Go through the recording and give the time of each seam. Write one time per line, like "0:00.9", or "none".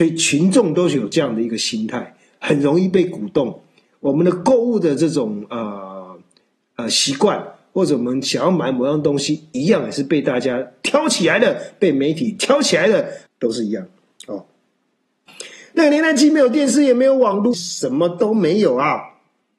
0:13.3
0:15.3
0:17.5